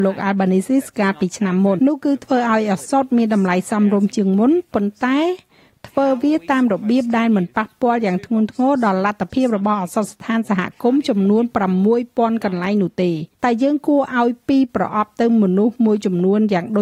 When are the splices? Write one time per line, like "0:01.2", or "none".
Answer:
0:01.8
0:13.3